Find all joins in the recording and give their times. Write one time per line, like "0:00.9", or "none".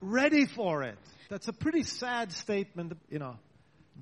0:01.3
0:03.0